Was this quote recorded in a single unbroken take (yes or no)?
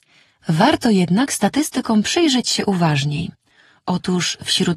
yes